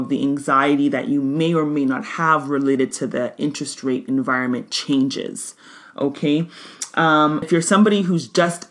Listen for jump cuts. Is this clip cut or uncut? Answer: cut